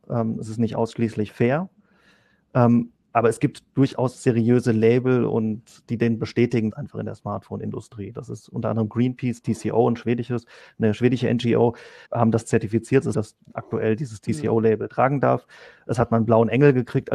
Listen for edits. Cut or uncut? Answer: cut